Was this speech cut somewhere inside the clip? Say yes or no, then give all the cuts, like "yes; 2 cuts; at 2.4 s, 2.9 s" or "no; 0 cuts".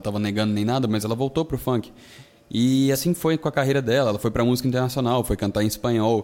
no; 0 cuts